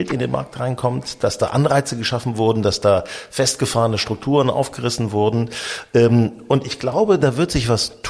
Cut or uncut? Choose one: uncut